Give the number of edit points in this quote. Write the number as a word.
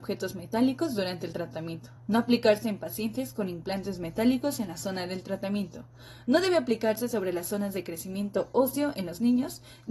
zero